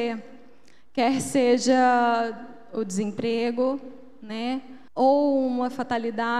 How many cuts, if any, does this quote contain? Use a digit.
1